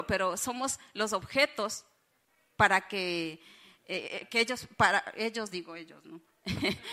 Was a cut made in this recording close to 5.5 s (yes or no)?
no